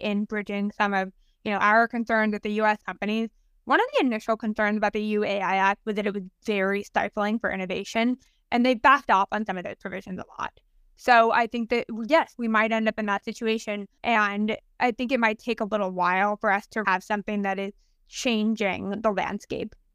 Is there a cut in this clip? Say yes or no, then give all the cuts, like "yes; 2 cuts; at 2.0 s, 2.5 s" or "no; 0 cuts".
yes; 3 cuts; at 2.8 s, 14.0 s, 16.8 s